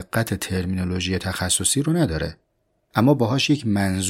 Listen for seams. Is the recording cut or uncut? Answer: uncut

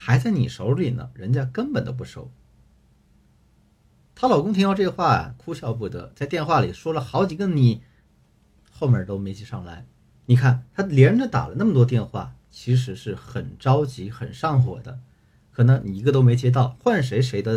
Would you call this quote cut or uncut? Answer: cut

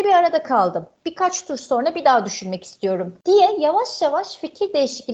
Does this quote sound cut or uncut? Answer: uncut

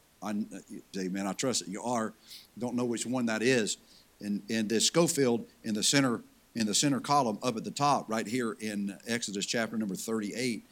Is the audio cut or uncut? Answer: cut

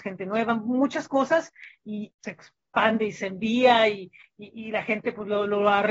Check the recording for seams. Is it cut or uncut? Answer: cut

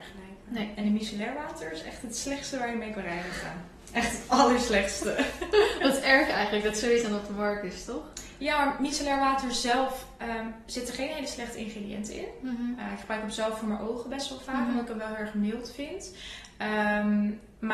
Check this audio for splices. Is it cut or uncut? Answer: uncut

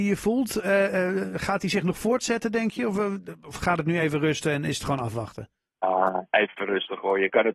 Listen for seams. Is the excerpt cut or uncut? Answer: uncut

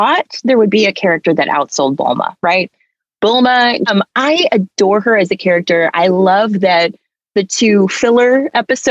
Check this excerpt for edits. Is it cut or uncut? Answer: cut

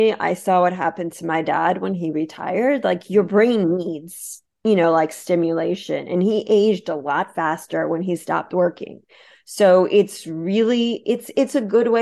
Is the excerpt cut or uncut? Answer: uncut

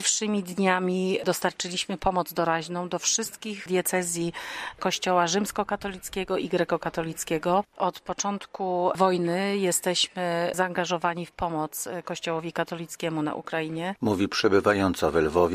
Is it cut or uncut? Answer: cut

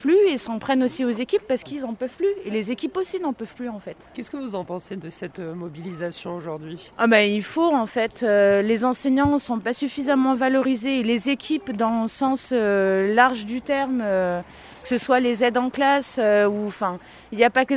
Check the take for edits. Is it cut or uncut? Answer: uncut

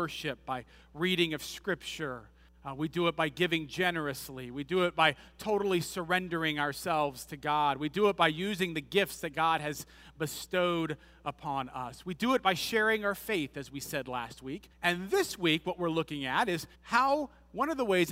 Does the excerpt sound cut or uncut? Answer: cut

